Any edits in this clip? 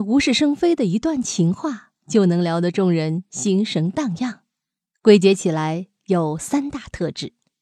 yes; 1 cut; at 4.9 s

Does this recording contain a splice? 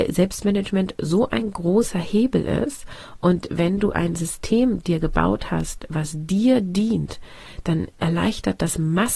no; 0 cuts

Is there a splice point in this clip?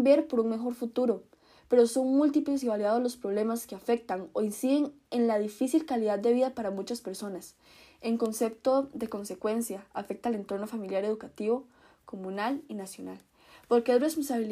no; 0 cuts

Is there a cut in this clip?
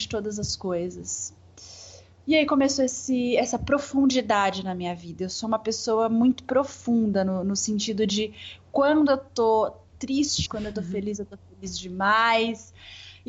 yes; 1 cut; at 10.5 s

